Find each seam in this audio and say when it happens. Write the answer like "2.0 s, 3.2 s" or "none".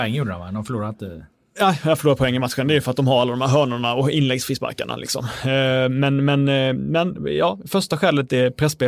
none